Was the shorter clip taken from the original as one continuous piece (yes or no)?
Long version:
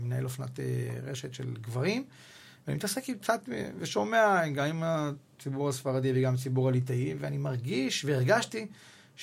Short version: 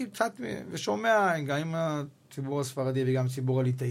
yes